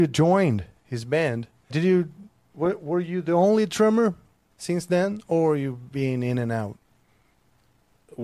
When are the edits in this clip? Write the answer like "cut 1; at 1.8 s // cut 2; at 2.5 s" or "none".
cut 1; at 1.7 s